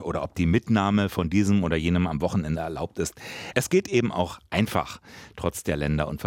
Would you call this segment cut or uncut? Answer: uncut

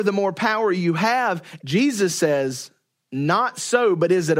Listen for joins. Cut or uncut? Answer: cut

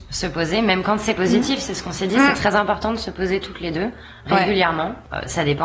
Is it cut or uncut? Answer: uncut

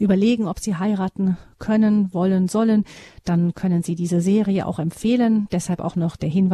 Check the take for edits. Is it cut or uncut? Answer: uncut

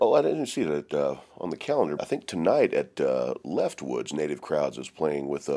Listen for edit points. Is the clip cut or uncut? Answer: cut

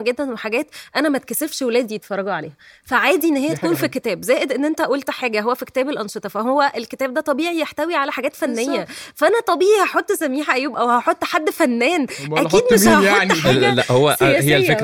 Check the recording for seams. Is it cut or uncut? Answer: uncut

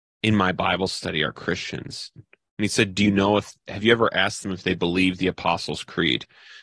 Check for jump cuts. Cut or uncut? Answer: cut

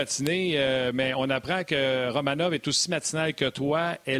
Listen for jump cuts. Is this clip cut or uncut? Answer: uncut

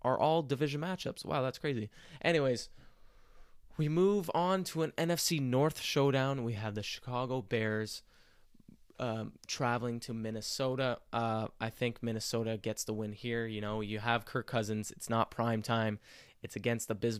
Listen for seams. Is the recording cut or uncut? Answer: uncut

